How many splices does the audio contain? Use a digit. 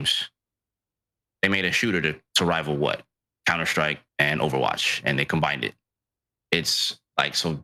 2